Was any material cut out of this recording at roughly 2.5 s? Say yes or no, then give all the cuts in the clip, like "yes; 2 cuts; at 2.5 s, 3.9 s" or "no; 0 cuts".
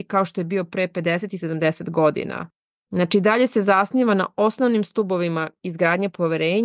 no; 0 cuts